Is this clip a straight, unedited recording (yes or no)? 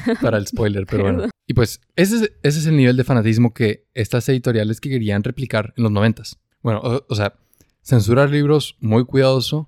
no